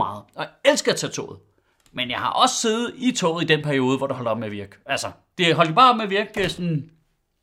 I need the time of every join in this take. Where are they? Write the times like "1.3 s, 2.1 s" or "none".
none